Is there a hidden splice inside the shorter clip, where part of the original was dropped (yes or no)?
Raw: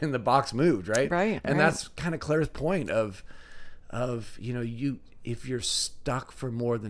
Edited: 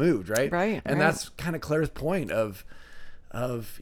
no